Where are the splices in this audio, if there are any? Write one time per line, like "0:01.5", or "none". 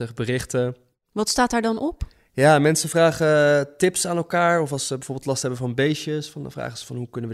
none